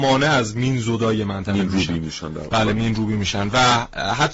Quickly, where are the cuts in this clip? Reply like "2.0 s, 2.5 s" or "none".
none